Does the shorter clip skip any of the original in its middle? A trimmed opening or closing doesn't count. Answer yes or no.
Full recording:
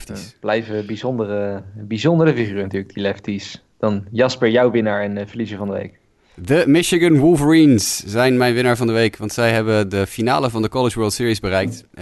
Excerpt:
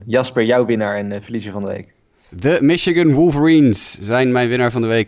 no